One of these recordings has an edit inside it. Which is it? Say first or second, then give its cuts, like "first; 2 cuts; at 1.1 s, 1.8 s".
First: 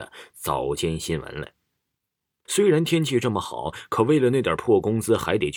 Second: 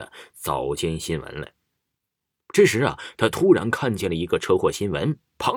first; 1 cut; at 2.5 s